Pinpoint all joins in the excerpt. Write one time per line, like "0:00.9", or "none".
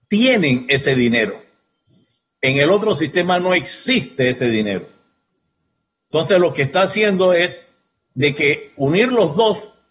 none